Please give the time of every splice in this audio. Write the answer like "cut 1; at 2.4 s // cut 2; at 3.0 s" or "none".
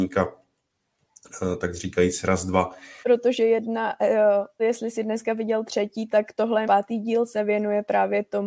cut 1; at 3.0 s // cut 2; at 4.6 s // cut 3; at 6.6 s